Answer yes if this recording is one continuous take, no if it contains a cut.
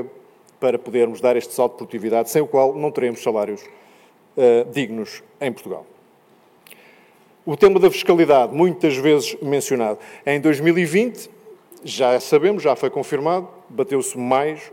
no